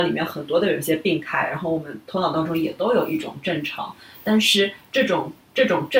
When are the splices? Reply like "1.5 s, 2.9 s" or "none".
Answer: none